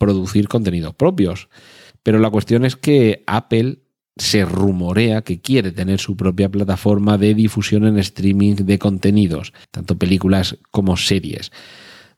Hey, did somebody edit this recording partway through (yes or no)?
yes